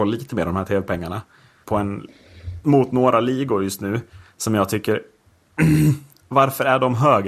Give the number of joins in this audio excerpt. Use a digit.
1